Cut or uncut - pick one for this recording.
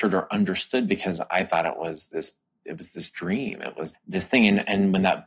cut